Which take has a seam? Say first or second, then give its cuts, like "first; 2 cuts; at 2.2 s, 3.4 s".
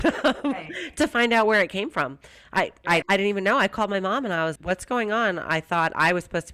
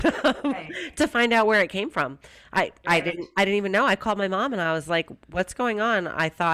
first; 2 cuts; at 3.0 s, 4.6 s